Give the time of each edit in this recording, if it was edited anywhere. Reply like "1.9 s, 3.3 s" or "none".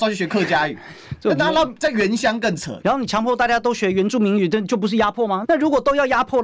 2.8 s, 5.4 s